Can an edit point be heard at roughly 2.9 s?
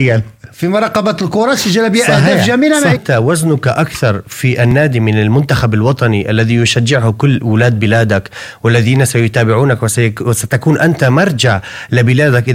yes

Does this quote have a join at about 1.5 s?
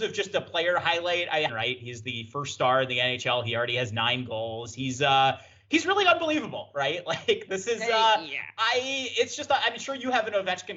yes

